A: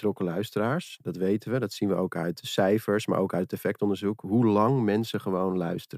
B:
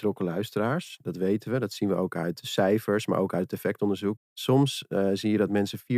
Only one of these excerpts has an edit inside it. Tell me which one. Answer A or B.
B